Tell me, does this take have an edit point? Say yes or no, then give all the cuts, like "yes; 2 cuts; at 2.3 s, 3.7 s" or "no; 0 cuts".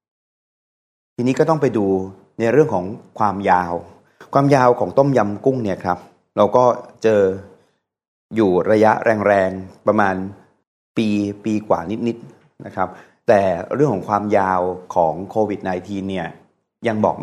no; 0 cuts